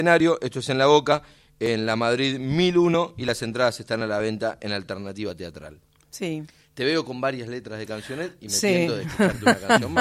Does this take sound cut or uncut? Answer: uncut